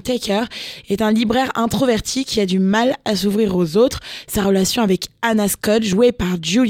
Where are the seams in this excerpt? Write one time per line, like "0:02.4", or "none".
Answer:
none